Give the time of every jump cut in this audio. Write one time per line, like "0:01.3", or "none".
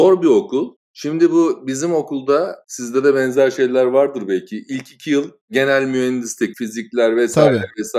0:06.5